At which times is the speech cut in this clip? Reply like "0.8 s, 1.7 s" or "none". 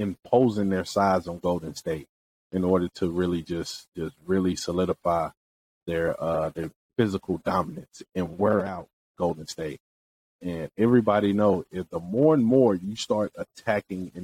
none